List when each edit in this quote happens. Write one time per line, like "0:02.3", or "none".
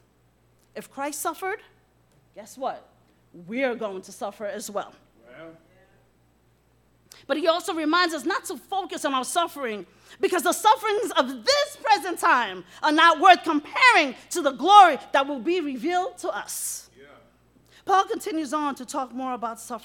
none

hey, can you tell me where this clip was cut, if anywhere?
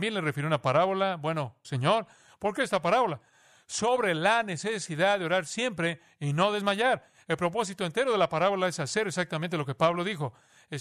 0:01.6

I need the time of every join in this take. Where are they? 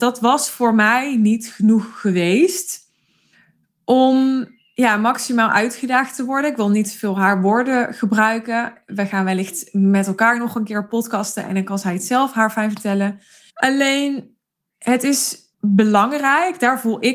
0:13.5
0:15.5

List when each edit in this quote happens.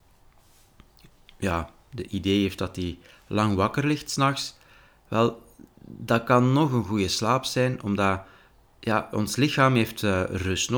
none

